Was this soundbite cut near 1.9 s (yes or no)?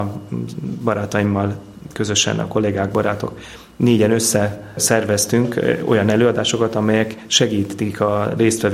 no